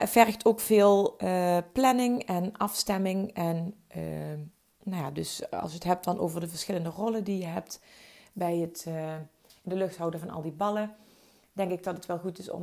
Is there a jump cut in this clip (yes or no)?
no